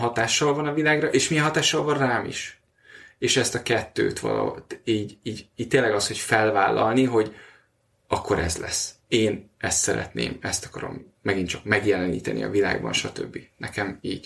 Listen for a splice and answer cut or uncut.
uncut